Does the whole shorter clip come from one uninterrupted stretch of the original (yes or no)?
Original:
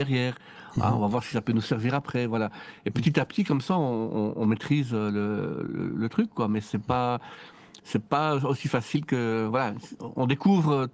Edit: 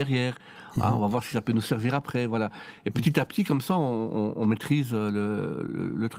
yes